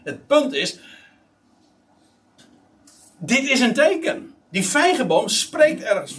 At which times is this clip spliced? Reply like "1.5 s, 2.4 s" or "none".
4.4 s

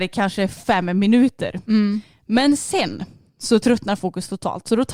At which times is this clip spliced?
none

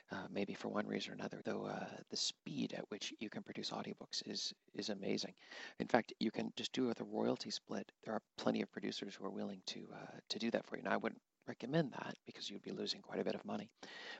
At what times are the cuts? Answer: 1.4 s, 6.6 s

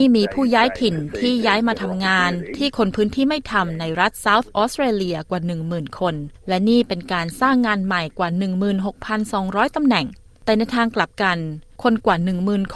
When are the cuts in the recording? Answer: none

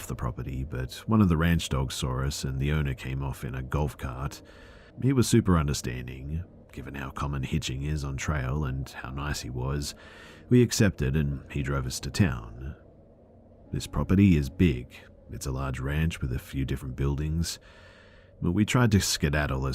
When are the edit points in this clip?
4.9 s, 6.6 s, 13.7 s

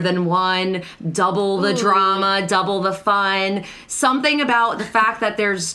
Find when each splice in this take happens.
none

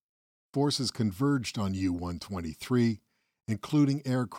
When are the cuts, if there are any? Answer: none

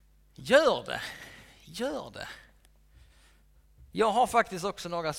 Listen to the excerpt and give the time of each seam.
none

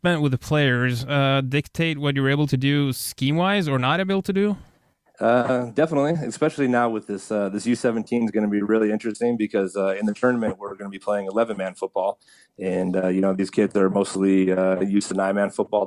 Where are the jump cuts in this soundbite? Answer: none

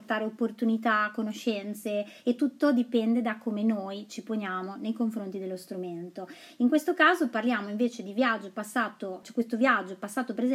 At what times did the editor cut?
9.2 s

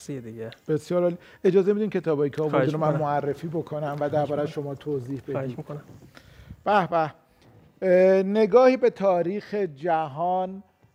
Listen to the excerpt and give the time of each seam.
none

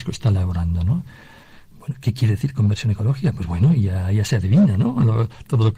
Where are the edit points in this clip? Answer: none

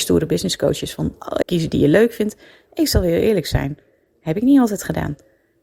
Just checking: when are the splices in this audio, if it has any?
1.4 s

